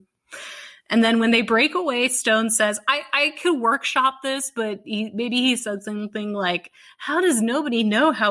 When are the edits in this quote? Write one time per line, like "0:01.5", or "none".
none